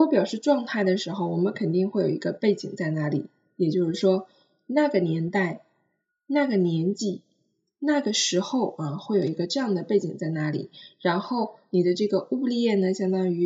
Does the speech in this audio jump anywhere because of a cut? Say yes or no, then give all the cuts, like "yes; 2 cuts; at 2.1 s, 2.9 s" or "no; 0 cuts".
no; 0 cuts